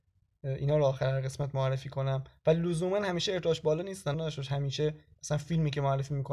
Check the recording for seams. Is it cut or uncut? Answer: cut